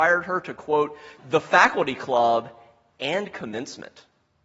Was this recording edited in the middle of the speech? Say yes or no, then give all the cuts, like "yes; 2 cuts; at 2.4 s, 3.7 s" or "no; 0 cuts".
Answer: yes; 1 cut; at 1.2 s